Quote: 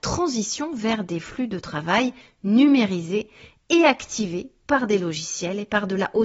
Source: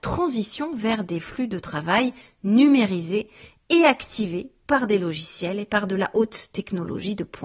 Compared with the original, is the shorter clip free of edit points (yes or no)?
yes